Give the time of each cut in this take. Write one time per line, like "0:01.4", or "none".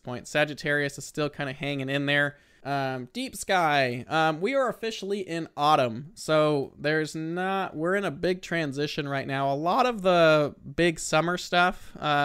0:02.6